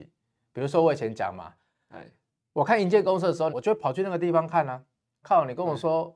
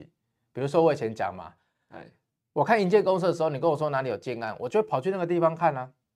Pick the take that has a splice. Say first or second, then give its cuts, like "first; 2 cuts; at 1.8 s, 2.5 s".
first; 2 cuts; at 3.5 s, 5.2 s